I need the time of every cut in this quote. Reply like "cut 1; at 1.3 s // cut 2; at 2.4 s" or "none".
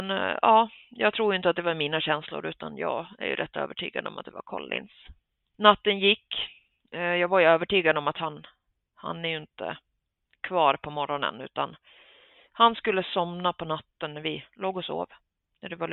none